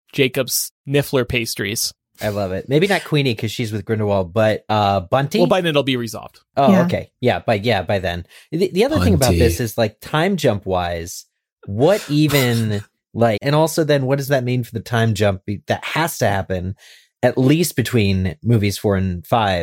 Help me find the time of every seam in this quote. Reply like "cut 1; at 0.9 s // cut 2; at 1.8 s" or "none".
cut 1; at 5.6 s // cut 2; at 13.4 s